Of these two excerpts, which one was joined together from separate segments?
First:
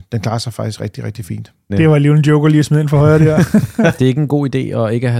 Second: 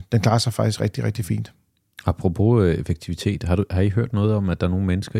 first; 2 cuts; at 1.7 s, 4.0 s

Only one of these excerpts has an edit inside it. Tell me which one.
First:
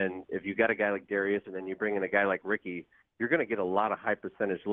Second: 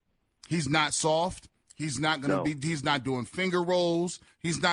first; 1 cut; at 1.4 s

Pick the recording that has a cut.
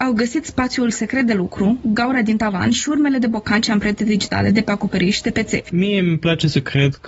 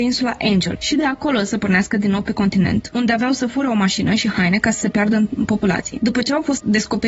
first; 1 cut; at 5.7 s

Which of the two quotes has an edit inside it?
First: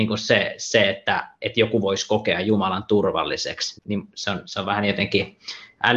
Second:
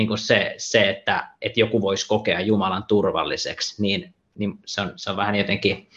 first; 1 cut; at 3.8 s

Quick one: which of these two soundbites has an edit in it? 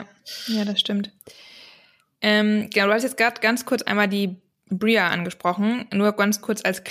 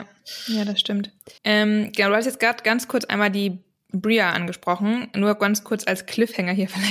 second; 1 cut; at 1.4 s

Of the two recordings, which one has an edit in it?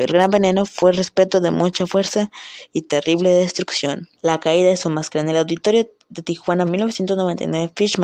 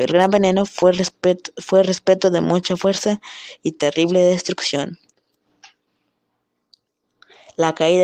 first; 3 cuts; at 0.9 s, 4.2 s, 6.7 s

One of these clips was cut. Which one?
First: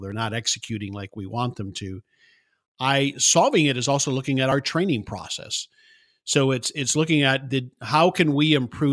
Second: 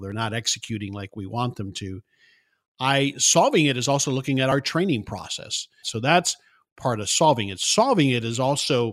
second; 1 cut; at 5.8 s

